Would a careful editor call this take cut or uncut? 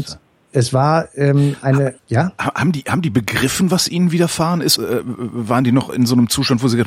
cut